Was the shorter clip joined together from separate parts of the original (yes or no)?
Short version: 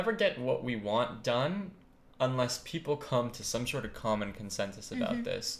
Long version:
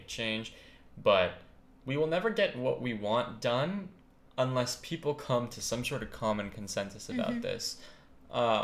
no